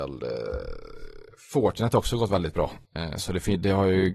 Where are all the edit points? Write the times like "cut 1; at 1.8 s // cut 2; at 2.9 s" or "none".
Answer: cut 1; at 2.8 s